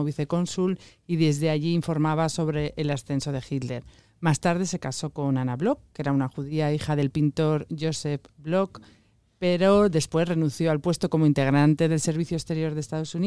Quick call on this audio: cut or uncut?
uncut